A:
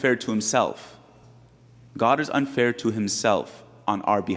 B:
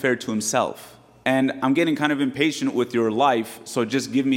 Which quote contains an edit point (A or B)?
B